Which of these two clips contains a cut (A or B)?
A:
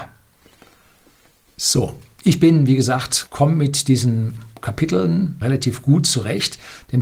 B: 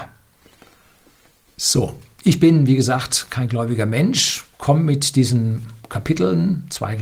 A